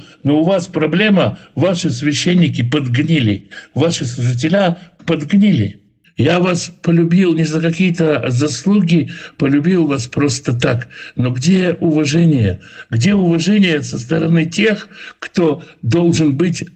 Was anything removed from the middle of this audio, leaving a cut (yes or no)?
no